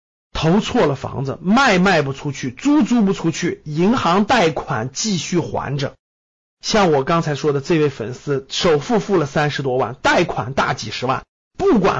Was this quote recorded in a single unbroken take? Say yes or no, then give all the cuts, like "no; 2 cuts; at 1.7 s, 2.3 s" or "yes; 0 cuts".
yes; 0 cuts